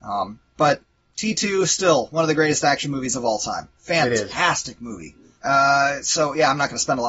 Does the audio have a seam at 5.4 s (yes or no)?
yes